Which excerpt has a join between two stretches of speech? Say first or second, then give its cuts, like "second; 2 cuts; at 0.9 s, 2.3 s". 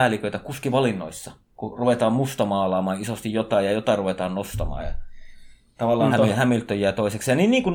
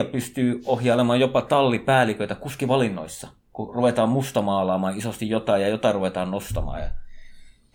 first; 1 cut; at 6.1 s